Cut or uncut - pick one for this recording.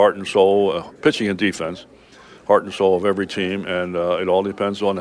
uncut